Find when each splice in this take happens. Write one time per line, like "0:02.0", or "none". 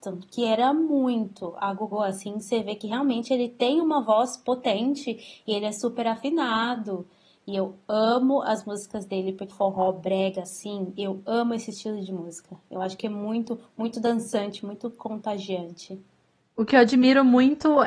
0:09.5